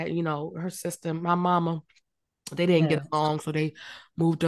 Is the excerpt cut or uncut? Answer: uncut